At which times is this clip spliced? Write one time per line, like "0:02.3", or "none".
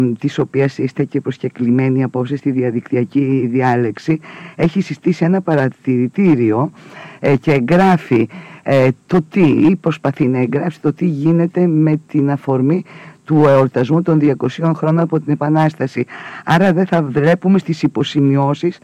none